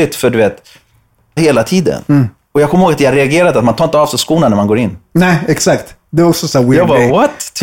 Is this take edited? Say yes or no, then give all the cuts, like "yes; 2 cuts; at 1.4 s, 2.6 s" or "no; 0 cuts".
yes; 1 cut; at 1.4 s